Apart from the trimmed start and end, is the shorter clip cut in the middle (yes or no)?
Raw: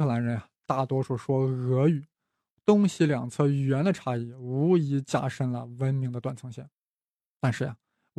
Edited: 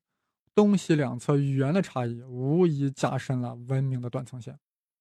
no